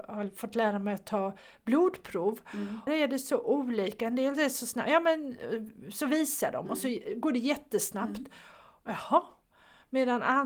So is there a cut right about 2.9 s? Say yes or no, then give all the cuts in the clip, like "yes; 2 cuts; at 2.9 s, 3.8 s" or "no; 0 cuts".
yes; 1 cut; at 2.9 s